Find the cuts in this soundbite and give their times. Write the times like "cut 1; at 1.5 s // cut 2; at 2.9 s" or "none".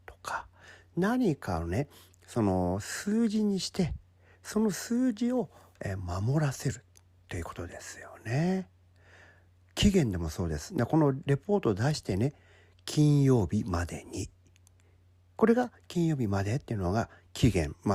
none